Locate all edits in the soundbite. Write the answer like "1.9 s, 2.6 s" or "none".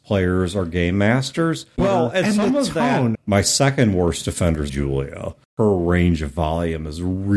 1.8 s, 3.1 s, 4.7 s